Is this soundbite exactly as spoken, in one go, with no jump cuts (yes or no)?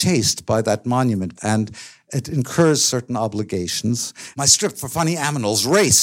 no